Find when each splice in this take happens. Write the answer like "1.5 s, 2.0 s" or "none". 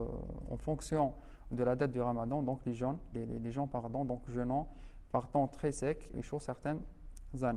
3.1 s, 6.1 s